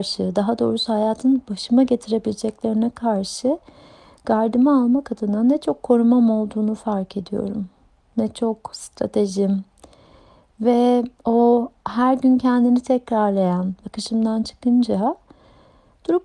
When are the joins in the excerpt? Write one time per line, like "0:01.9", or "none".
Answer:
0:13.8